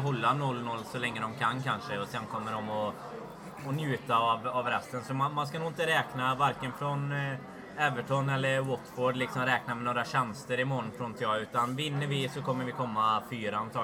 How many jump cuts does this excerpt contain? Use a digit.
0